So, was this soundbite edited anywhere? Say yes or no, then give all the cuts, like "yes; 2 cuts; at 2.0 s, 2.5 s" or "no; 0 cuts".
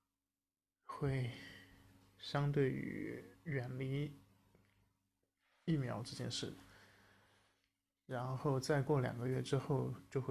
no; 0 cuts